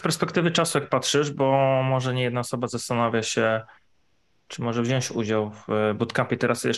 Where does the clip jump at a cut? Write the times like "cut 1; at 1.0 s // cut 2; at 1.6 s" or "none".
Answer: none

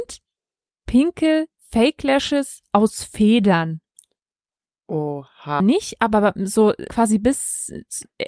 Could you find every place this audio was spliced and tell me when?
cut 1; at 5.6 s // cut 2; at 6.9 s

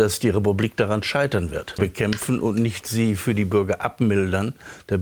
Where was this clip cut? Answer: cut 1; at 1.8 s

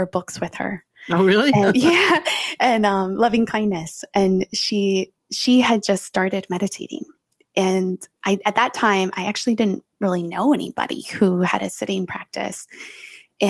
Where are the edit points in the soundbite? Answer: none

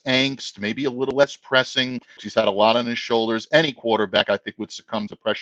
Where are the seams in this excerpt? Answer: cut 1; at 2.2 s

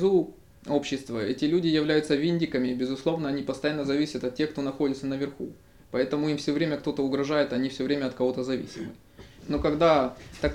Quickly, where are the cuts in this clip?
cut 1; at 9.4 s

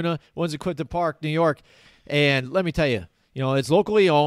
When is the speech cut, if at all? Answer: none

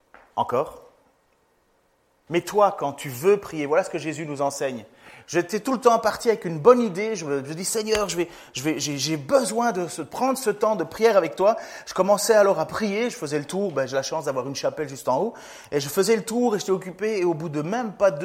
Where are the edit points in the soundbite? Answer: cut 1; at 2.3 s // cut 2; at 5.2 s

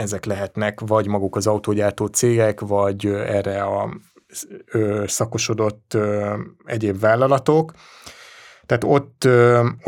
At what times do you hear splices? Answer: none

